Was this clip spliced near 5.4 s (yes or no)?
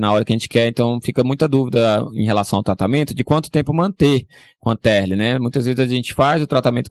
no